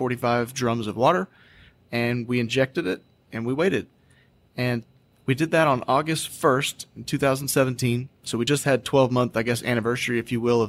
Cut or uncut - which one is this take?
uncut